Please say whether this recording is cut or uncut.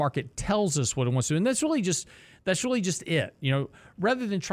uncut